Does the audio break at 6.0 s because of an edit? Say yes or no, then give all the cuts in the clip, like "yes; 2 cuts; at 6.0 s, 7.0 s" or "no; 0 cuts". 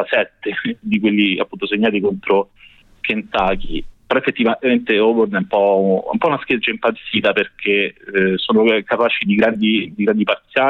no; 2 cuts; at 3.9 s, 9.2 s